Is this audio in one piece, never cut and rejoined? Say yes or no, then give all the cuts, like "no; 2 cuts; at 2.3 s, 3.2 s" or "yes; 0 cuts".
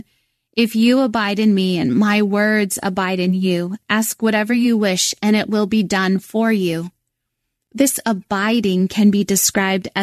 yes; 0 cuts